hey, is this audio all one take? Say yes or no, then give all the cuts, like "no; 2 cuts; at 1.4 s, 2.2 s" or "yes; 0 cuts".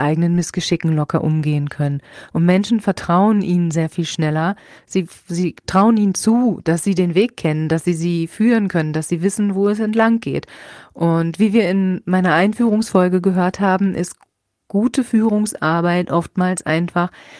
yes; 0 cuts